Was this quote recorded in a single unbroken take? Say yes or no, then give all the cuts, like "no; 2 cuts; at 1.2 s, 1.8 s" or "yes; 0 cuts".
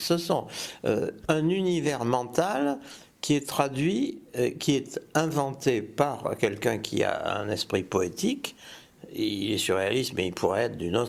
yes; 0 cuts